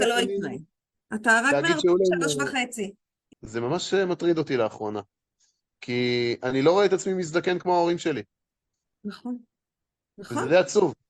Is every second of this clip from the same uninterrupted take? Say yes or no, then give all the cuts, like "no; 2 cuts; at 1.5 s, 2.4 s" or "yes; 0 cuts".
no; 1 cut; at 3.3 s